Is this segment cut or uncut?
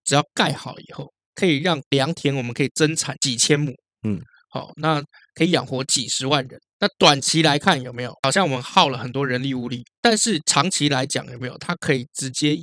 uncut